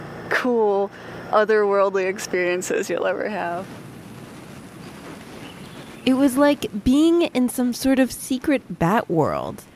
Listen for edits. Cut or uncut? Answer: uncut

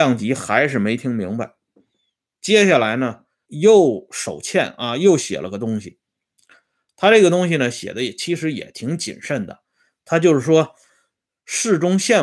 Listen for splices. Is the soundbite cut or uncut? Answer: cut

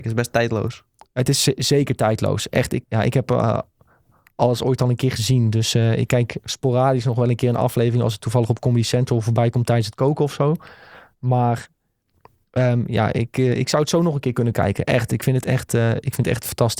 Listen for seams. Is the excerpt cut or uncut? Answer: cut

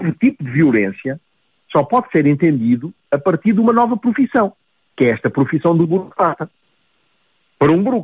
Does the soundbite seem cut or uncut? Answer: uncut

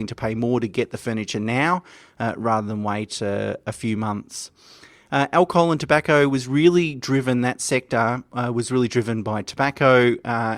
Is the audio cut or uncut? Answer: uncut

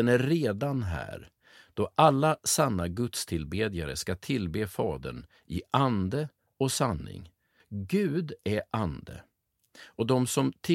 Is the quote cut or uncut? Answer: cut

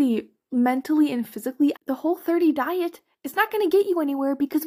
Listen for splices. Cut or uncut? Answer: cut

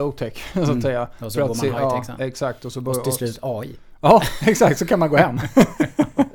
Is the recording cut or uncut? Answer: uncut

